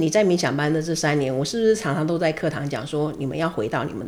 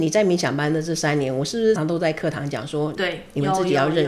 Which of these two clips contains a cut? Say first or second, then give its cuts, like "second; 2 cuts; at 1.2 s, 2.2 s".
second; 2 cuts; at 1.8 s, 3.0 s